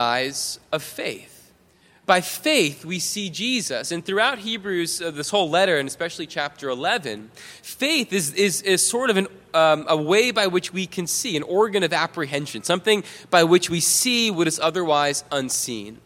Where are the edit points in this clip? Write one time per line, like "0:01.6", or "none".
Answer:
none